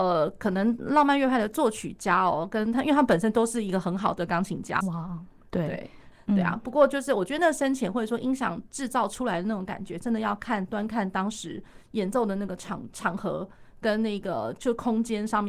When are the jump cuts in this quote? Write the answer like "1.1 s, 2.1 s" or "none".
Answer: 4.8 s, 6.1 s